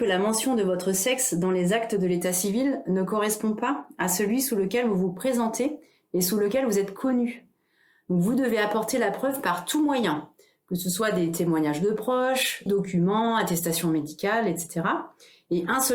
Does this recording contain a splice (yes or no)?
yes